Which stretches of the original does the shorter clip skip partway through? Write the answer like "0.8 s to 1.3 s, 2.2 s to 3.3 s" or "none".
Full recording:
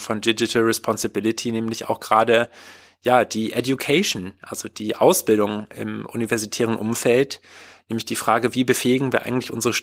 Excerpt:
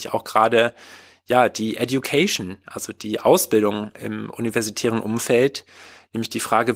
none